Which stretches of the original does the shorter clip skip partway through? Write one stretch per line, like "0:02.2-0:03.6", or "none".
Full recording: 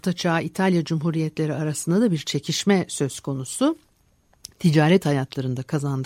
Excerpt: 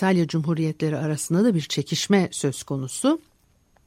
none